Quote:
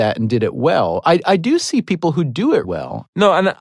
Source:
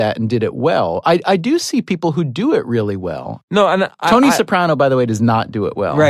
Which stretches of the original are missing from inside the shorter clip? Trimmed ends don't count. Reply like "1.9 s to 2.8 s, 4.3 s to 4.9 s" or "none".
2.6 s to 3.0 s